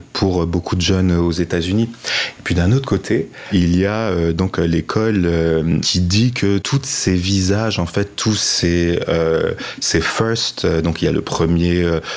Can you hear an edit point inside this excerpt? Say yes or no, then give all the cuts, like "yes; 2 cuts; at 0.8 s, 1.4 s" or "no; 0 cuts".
no; 0 cuts